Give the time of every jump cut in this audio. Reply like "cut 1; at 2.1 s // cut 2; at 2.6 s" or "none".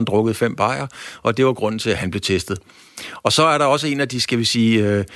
none

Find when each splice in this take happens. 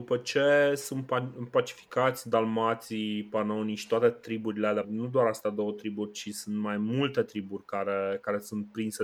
cut 1; at 4.8 s

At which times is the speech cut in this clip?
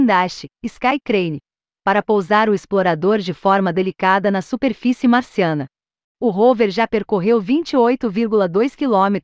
none

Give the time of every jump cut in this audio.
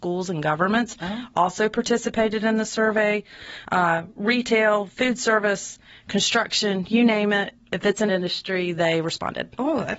none

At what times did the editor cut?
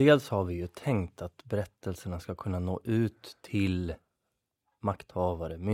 none

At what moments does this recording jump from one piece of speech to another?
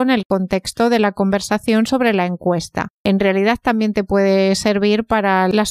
cut 1; at 3.0 s

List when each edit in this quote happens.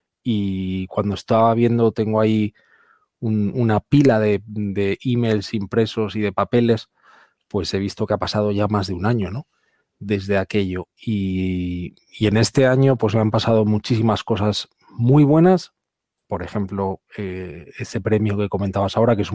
none

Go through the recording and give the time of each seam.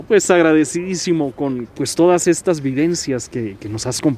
none

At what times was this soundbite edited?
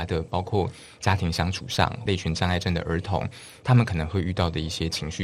cut 1; at 2.1 s

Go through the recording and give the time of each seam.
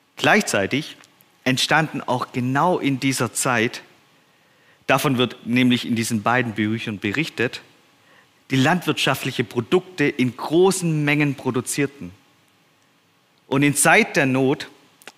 cut 1; at 8.4 s

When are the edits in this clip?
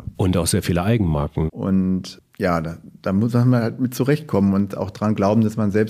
cut 1; at 1.5 s

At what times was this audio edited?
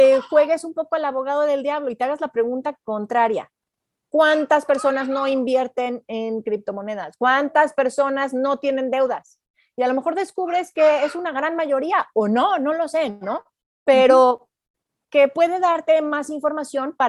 none

